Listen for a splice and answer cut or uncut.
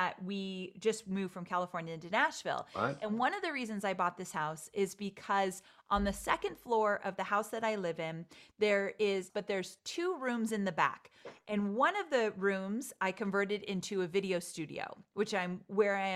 cut